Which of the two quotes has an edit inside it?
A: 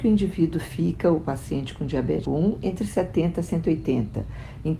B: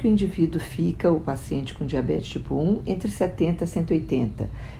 A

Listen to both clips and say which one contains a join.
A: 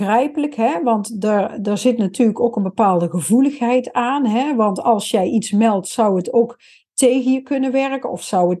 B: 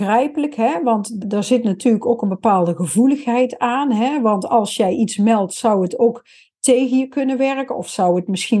B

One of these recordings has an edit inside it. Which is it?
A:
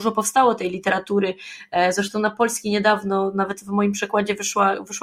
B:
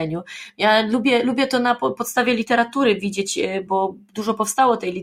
B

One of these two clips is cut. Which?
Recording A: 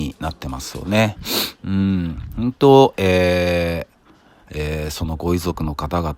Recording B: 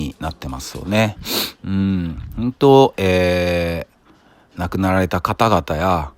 A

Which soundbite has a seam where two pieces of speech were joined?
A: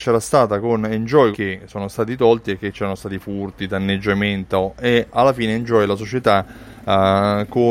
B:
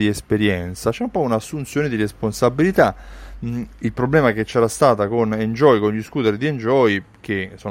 A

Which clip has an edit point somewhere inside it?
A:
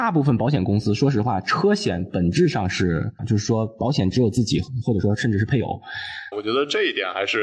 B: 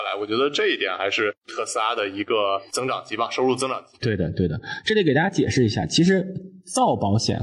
A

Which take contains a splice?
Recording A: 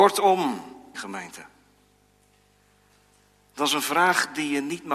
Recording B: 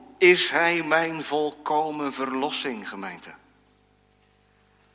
A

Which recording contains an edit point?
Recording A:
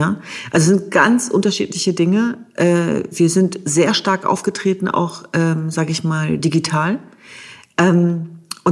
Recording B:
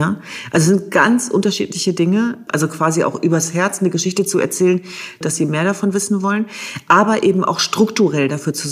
B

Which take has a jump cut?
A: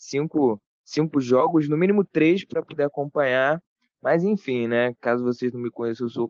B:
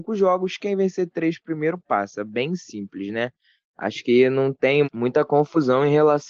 B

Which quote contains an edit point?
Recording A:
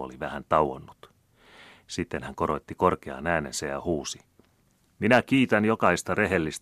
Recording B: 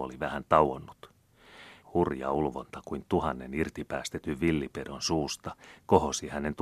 B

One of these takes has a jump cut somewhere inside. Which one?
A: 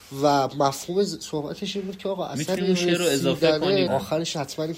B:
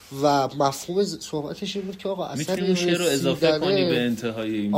A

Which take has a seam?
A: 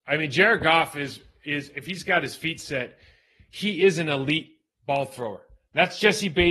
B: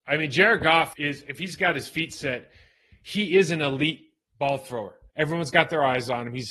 B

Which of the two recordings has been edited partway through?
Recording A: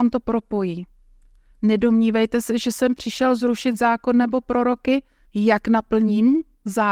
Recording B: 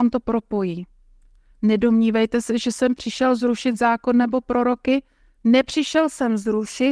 A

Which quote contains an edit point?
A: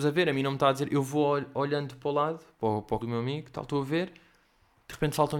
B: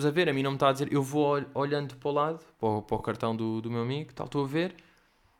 A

